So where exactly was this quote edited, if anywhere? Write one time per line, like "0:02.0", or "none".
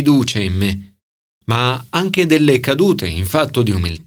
none